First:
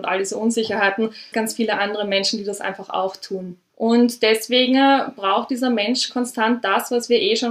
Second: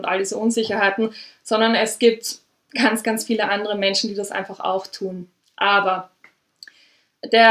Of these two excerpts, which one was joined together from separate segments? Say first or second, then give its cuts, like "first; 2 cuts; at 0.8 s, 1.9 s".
first; 2 cuts; at 1.3 s, 3.7 s